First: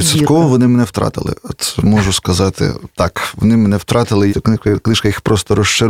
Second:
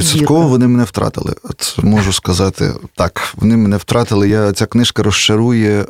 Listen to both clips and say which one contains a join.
first; 1 cut; at 4.3 s

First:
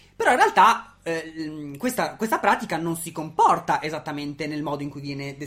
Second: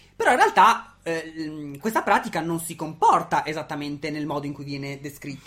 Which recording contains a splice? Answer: second; 1 cut; at 1.8 s

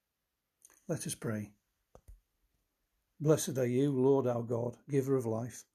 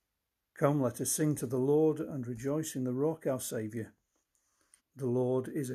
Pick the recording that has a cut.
second; 1 cut; at 4.8 s

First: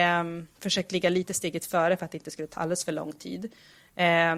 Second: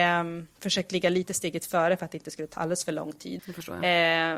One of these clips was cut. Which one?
second; 1 cut; at 3.4 s

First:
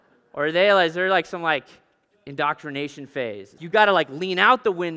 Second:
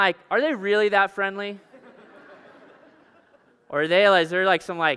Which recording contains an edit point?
first; 1 cut; at 3.6 s

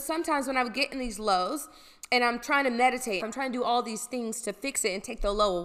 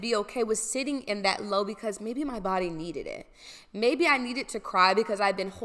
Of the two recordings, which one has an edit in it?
first; 1 cut; at 3.2 s

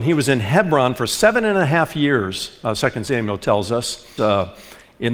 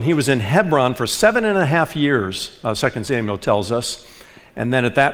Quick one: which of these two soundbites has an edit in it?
first; 1 cut; at 4.2 s

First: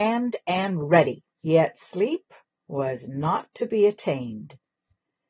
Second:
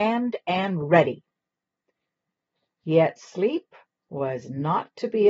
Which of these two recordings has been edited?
first; 1 cut; at 1.3 s

